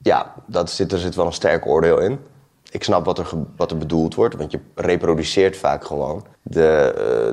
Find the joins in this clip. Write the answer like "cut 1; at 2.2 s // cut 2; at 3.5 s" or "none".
cut 1; at 6.3 s